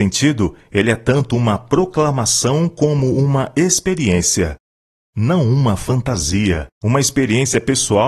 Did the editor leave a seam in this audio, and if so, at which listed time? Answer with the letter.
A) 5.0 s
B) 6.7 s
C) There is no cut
B